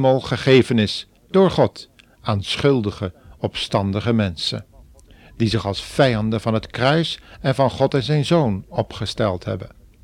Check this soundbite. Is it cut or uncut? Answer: uncut